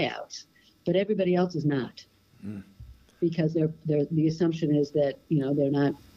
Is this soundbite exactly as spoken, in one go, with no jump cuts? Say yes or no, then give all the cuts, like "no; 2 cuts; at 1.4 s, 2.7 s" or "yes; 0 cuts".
yes; 0 cuts